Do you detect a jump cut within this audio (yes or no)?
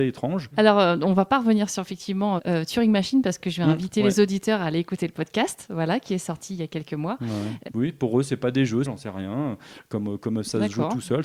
yes